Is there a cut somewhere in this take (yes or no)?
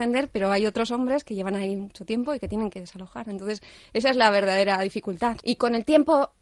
yes